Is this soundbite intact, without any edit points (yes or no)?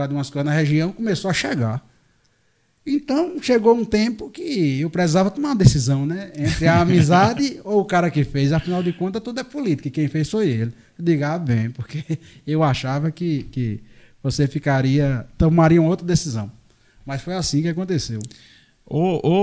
yes